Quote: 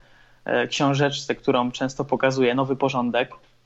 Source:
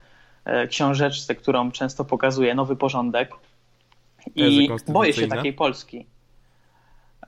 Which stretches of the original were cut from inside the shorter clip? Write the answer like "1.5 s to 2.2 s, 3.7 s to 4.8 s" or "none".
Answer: none